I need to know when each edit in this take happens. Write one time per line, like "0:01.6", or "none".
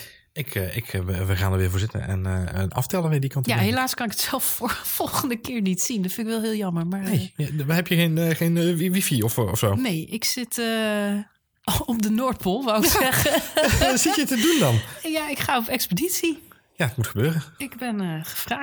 none